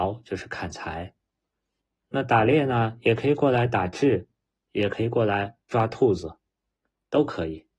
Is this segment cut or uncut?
uncut